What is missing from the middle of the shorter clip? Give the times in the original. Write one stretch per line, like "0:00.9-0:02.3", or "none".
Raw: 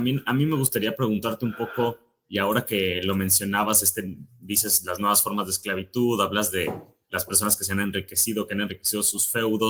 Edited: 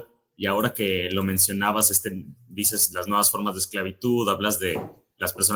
none